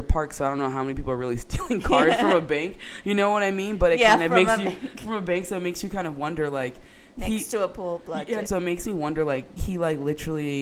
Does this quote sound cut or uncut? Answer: cut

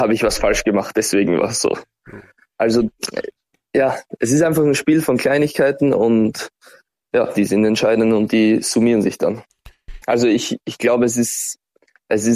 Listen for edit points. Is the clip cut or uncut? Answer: cut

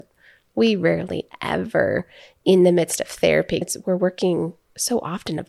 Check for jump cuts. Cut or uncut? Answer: cut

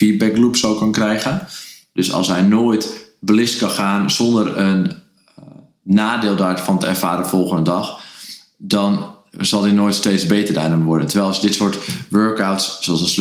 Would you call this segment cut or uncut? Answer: uncut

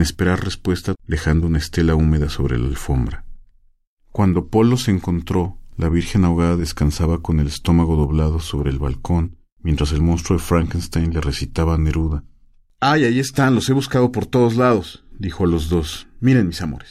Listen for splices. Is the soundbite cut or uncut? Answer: cut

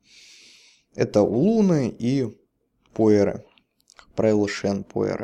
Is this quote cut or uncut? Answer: uncut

